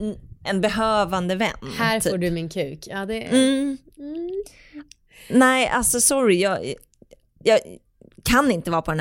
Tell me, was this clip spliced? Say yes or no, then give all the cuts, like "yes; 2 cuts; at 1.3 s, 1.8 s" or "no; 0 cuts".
no; 0 cuts